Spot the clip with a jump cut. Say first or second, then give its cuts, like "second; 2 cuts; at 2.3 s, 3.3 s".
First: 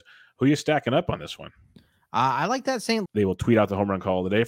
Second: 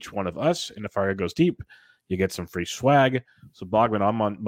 first; 1 cut; at 3.1 s